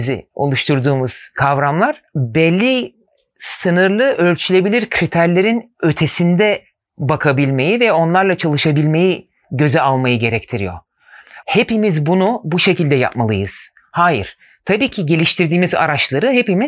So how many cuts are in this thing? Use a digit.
1